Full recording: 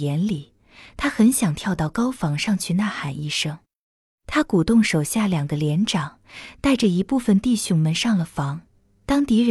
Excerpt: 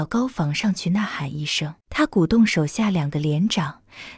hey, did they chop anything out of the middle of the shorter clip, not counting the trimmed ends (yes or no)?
yes